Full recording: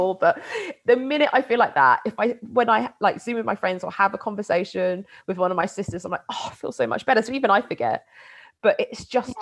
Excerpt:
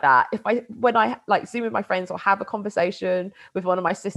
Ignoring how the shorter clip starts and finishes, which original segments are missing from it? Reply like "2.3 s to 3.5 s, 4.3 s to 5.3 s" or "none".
none

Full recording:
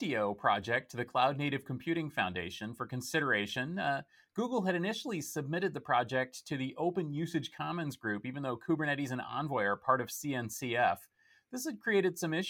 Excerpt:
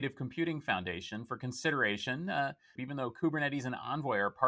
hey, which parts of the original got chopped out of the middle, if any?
4.2 s to 8.2 s

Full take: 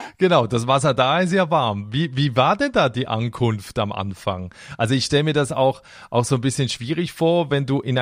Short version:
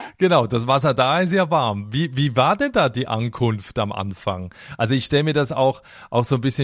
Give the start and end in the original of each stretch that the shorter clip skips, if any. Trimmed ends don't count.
none

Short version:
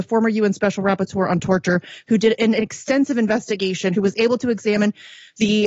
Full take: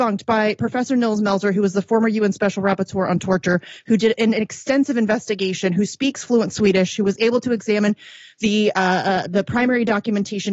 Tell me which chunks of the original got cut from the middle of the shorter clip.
5.7 s to 7.0 s

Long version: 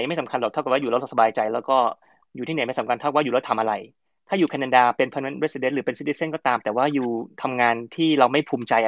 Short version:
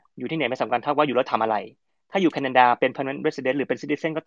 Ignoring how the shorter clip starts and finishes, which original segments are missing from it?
none

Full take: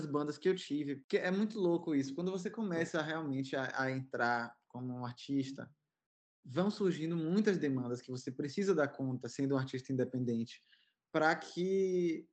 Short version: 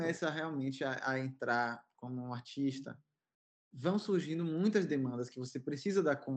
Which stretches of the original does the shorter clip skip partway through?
none

